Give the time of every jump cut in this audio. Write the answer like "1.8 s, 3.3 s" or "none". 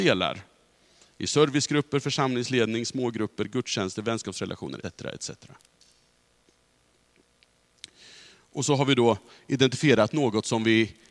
4.8 s